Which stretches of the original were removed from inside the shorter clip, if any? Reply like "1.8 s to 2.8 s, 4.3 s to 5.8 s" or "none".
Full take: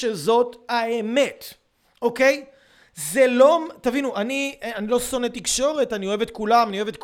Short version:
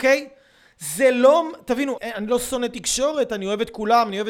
4.1 s to 4.6 s